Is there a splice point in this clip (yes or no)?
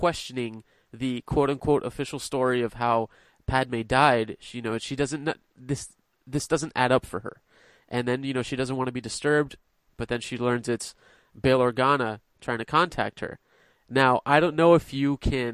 no